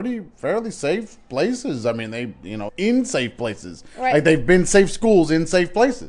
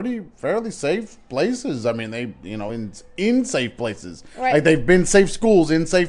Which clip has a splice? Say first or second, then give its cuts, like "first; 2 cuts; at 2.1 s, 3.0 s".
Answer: first; 1 cut; at 2.7 s